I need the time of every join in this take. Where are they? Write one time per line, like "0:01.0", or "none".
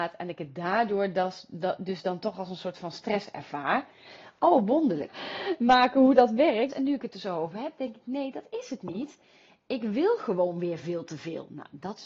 0:05.1
0:06.7